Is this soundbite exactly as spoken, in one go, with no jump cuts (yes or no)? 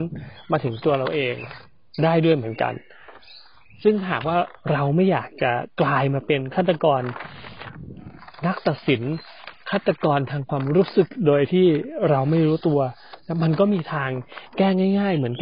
yes